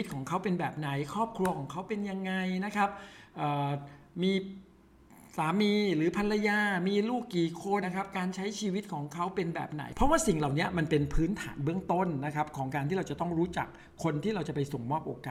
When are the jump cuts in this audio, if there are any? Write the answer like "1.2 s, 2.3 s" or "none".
7.8 s